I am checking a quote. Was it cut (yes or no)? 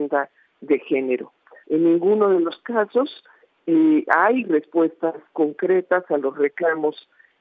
yes